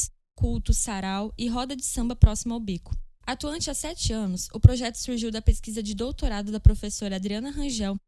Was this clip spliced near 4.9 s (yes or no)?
no